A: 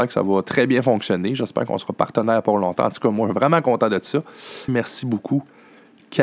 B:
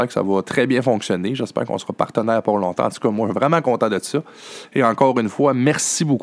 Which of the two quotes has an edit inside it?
A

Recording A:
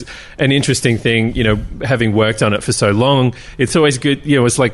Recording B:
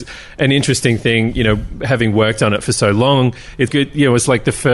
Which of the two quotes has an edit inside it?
B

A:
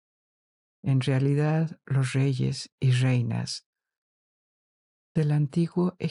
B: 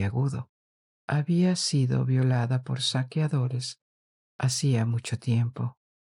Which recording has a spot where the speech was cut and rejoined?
B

